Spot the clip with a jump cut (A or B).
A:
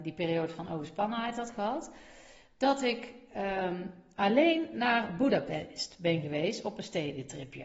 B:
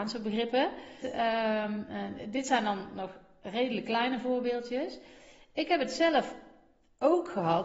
B